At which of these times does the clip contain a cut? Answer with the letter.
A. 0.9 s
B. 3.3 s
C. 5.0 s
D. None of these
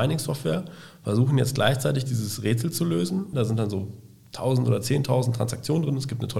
B